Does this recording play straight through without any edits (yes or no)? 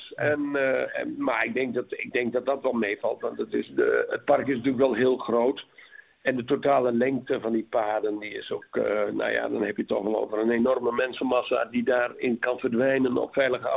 yes